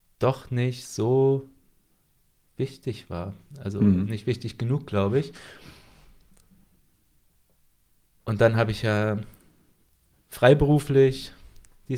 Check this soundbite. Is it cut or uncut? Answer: uncut